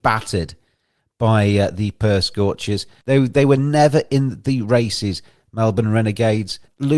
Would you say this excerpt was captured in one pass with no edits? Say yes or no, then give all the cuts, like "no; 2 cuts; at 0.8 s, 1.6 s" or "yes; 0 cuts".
no; 1 cut; at 3.0 s